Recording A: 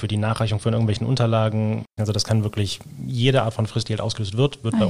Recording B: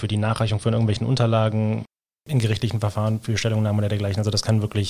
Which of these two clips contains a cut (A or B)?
A